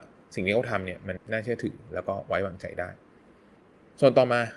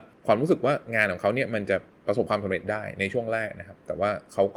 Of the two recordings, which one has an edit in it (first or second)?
first